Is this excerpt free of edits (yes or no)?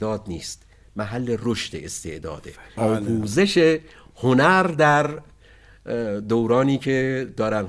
no